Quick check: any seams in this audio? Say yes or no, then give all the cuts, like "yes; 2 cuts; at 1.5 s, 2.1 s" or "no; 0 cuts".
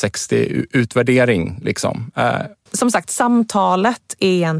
yes; 1 cut; at 2.7 s